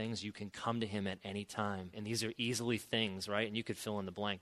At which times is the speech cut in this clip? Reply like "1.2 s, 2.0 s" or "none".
1.9 s